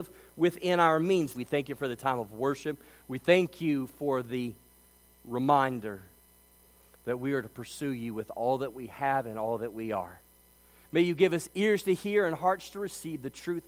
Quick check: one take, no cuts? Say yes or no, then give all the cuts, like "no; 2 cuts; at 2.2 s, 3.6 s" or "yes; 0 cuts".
no; 2 cuts; at 1.3 s, 10.8 s